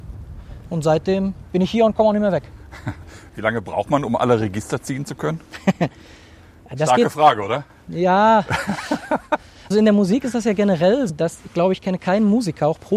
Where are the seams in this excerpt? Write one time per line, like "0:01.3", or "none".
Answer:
0:09.7
0:11.1